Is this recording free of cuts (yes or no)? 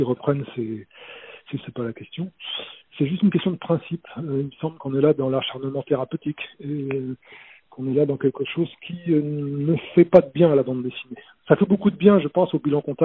no